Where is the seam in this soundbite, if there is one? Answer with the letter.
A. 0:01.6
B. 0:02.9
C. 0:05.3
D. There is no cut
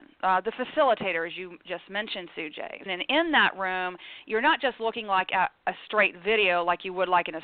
B